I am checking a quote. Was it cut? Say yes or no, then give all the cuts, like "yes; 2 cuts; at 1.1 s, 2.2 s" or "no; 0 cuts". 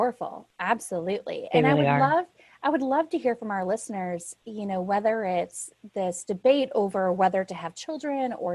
no; 0 cuts